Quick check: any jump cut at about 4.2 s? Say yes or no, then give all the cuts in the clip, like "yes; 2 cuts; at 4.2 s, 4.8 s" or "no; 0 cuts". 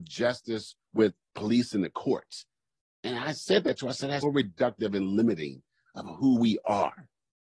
yes; 1 cut; at 4.2 s